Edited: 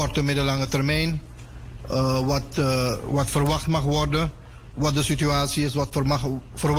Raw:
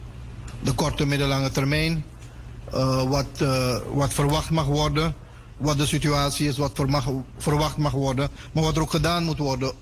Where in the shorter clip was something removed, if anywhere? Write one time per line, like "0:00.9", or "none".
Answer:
none